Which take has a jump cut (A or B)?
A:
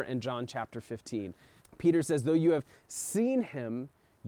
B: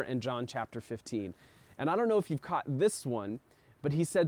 A